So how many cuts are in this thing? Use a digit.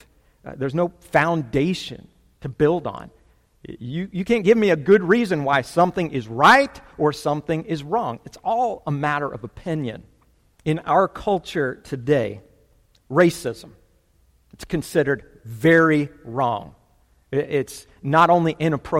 1